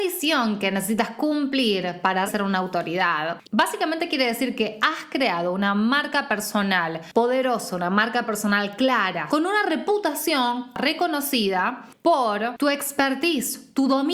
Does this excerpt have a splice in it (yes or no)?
yes